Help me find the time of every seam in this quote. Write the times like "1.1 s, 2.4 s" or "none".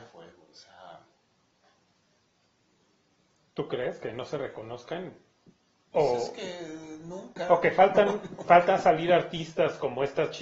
none